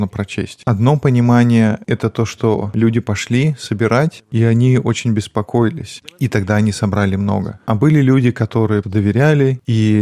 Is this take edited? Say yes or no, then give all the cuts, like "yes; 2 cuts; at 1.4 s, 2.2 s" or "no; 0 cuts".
yes; 1 cut; at 8.8 s